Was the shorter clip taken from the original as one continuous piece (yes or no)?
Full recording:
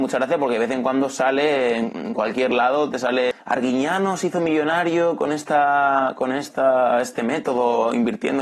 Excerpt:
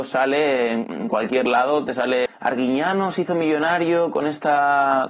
yes